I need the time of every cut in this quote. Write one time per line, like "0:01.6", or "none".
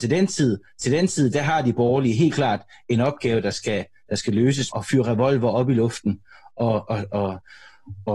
0:04.7
0:07.1